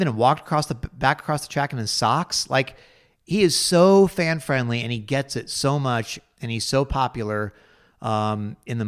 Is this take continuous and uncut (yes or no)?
yes